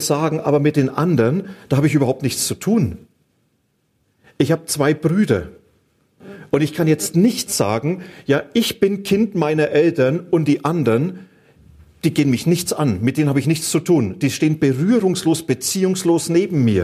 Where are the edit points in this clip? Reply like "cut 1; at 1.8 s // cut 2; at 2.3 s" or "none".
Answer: none